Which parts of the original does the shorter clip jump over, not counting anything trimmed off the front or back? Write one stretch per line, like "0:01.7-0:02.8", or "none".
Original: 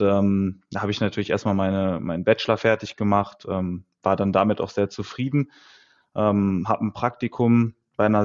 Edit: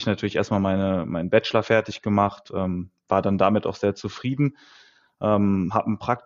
none